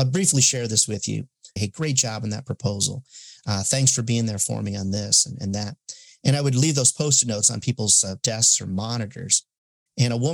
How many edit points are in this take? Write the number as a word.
one